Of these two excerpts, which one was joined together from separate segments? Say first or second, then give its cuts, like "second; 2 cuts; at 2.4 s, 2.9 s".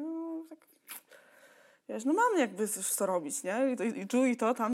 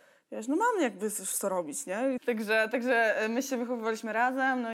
second; 1 cut; at 2.2 s